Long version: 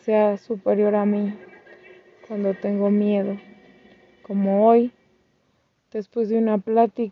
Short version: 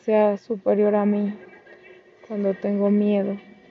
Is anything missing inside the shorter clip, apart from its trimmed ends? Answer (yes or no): no